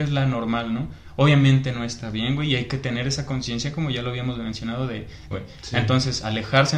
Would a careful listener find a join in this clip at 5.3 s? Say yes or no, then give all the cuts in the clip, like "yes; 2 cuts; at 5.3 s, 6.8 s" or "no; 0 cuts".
yes; 1 cut; at 5.3 s